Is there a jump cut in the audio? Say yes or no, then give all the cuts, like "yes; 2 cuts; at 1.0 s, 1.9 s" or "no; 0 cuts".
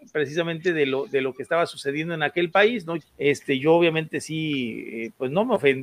yes; 1 cut; at 3.0 s